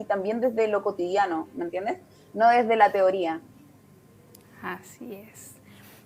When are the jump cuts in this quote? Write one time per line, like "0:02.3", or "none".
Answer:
none